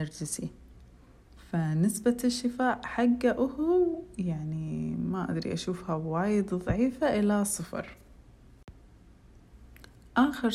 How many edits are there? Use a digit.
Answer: 0